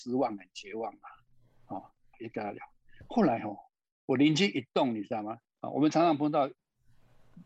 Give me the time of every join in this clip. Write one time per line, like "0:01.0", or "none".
0:02.1
0:05.5

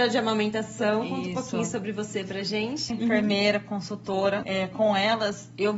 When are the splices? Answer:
0:02.9
0:04.4

